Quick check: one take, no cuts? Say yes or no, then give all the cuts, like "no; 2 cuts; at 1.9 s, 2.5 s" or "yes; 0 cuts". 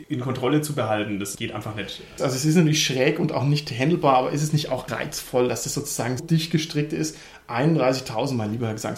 no; 3 cuts; at 2.2 s, 4.9 s, 6.2 s